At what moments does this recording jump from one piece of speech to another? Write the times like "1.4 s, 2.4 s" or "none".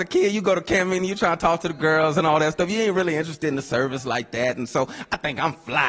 none